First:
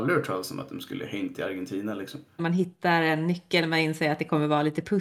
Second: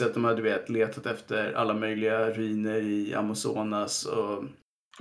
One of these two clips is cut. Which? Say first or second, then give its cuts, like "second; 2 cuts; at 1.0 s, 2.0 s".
first; 1 cut; at 2.4 s